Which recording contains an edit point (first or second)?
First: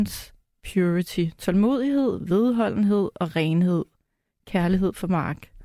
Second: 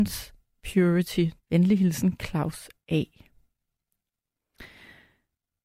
second